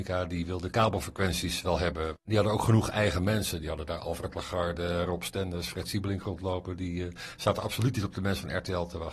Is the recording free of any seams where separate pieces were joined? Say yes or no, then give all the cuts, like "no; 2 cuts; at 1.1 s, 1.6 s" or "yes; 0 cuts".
yes; 0 cuts